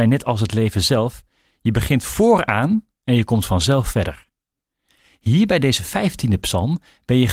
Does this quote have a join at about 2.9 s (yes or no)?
yes